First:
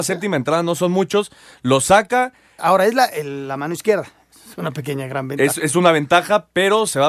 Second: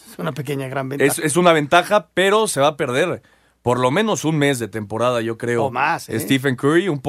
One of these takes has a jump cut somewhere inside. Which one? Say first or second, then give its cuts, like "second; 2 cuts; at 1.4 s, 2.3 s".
first; 1 cut; at 2.6 s